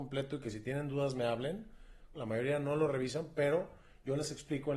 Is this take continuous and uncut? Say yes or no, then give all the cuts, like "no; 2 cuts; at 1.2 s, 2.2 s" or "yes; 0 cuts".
no; 1 cut; at 2.1 s